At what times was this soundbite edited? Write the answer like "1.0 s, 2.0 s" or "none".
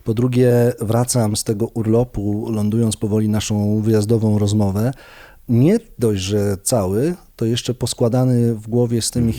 none